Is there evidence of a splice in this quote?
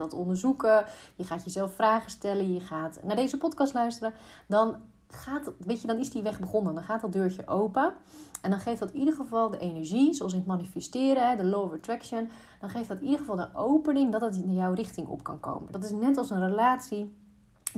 no; 0 cuts

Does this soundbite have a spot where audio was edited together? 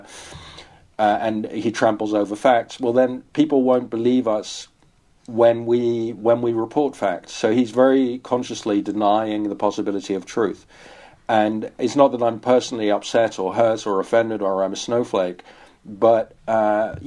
no; 0 cuts

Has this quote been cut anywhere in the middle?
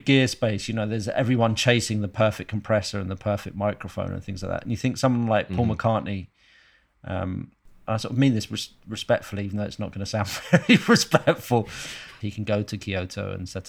yes; 1 cut; at 12.2 s

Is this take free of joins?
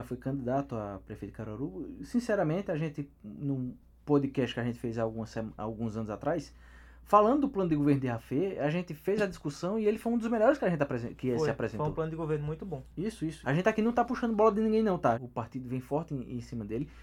no; 2 cuts; at 13.4 s, 15.1 s

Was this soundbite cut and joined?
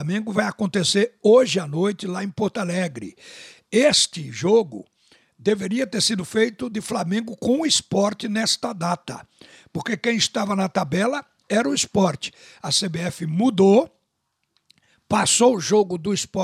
no; 0 cuts

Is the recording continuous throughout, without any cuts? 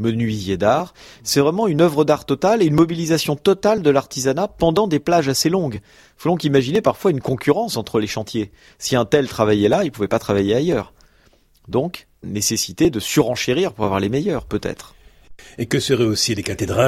no; 1 cut; at 12.2 s

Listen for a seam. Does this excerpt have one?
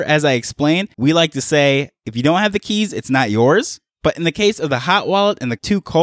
yes; 1 cut; at 0.9 s

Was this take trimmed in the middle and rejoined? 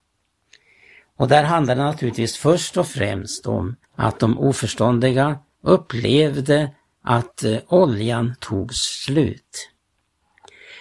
yes; 1 cut; at 3.8 s

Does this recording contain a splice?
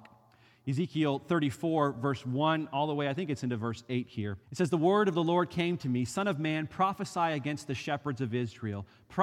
yes; 1 cut; at 4.4 s

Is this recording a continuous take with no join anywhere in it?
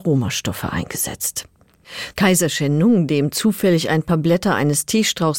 no; 1 cut; at 2.1 s

